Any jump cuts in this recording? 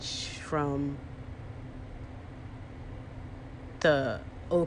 no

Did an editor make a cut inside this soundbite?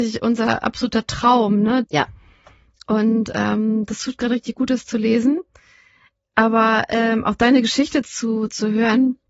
yes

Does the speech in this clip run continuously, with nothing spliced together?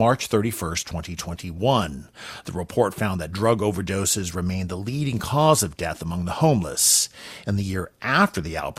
no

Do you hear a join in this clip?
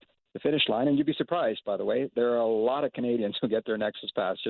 no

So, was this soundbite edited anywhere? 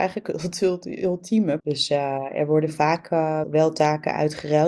yes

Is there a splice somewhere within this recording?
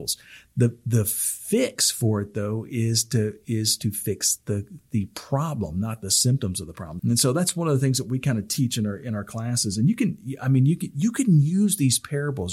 yes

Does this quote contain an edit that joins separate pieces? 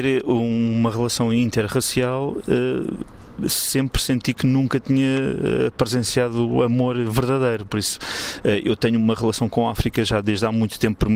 no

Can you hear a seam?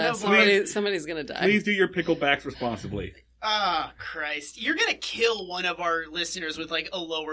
no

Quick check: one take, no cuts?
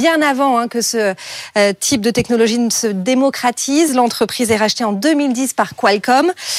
yes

